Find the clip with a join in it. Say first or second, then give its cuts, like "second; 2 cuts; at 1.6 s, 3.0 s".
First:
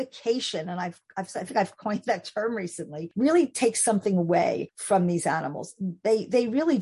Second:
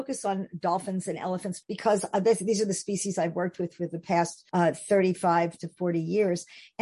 second; 1 cut; at 1.6 s